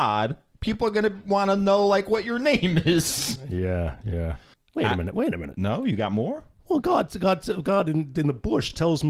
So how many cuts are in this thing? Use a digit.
1